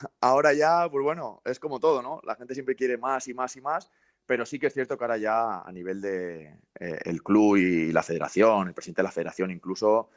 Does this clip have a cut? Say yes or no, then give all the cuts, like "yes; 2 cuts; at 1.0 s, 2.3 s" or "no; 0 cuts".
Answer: no; 0 cuts